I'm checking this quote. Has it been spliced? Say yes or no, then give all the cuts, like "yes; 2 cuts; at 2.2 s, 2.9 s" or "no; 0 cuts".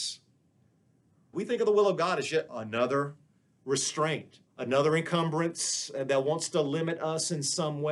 yes; 2 cuts; at 1.3 s, 4.5 s